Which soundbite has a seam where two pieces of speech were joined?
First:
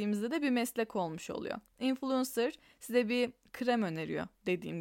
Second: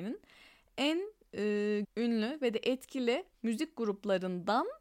second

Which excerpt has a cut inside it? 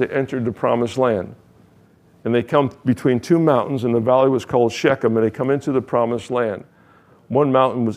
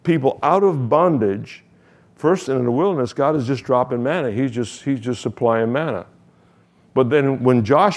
second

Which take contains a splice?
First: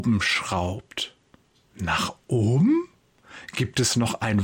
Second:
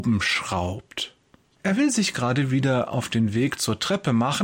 second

